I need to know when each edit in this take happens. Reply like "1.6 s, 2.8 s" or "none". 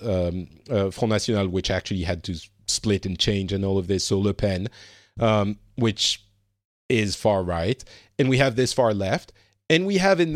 none